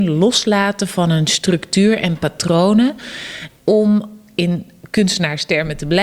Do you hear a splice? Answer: yes; 1 cut; at 3.6 s

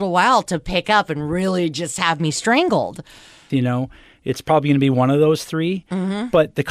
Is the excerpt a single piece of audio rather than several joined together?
no; 1 cut; at 3.5 s

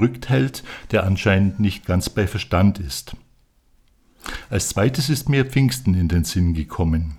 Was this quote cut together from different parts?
no; 0 cuts

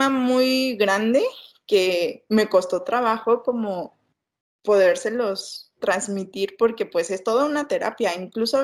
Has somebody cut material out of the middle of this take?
no; 0 cuts

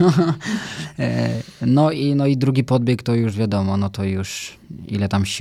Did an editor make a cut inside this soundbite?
no; 0 cuts

